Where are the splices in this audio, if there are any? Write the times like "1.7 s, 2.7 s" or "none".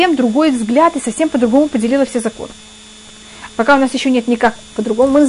3.5 s